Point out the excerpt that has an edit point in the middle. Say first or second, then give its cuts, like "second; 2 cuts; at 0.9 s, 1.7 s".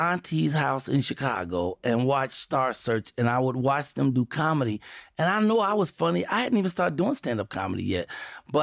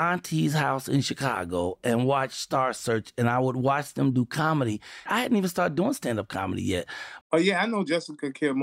second; 2 cuts; at 5.1 s, 7.2 s